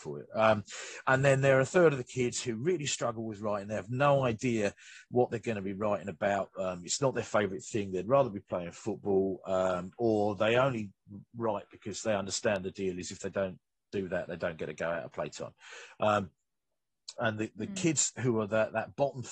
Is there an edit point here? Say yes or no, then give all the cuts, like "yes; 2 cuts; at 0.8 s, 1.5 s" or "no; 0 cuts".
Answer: yes; 1 cut; at 17.2 s